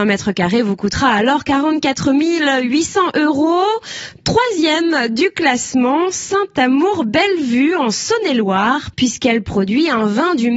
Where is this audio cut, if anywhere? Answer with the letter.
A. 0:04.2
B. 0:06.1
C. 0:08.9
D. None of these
C